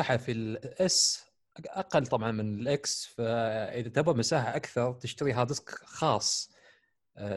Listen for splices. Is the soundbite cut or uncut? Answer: uncut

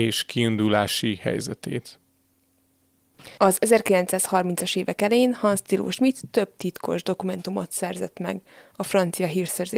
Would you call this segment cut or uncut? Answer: cut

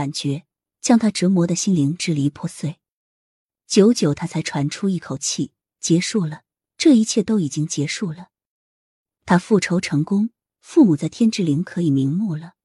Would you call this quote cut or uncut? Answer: uncut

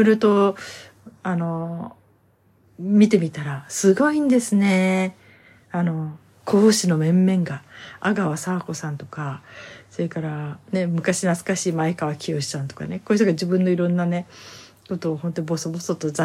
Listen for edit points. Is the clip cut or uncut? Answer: uncut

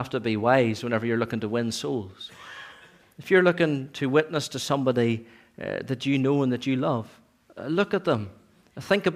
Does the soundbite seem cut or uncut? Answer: uncut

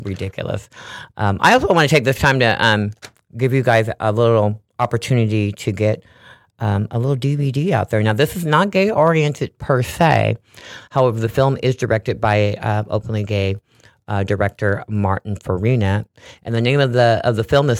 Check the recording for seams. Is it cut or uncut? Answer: cut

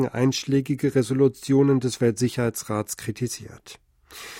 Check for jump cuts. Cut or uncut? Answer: uncut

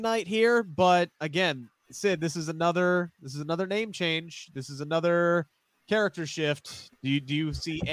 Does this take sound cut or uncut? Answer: uncut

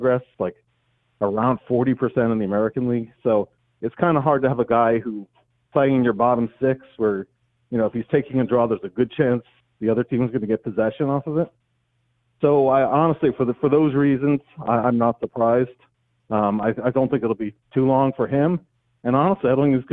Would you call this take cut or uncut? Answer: uncut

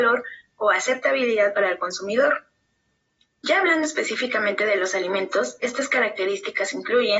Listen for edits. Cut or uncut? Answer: uncut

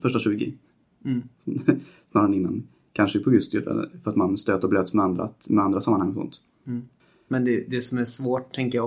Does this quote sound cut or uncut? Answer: uncut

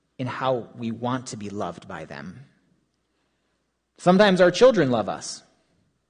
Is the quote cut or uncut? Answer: uncut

